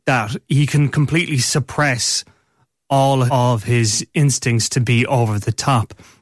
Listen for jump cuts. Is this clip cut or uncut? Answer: cut